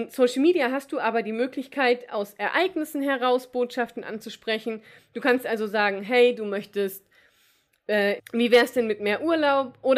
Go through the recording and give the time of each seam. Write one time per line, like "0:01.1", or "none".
0:08.2

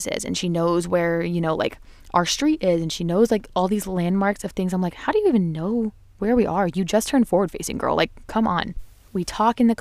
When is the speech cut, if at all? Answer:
none

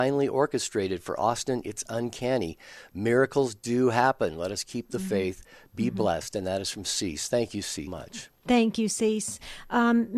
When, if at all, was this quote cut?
0:07.9

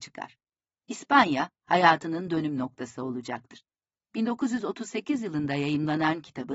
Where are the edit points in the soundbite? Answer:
none

